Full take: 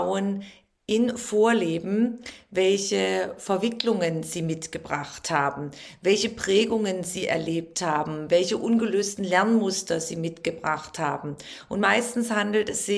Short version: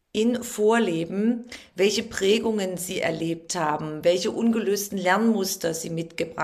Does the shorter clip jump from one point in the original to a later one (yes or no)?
yes